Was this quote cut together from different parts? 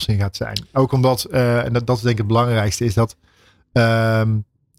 no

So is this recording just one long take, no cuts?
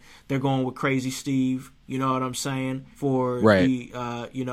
no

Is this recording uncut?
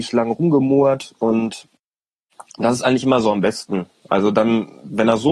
yes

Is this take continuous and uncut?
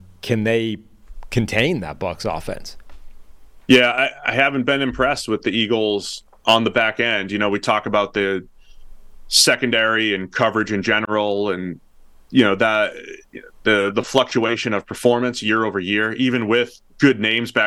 yes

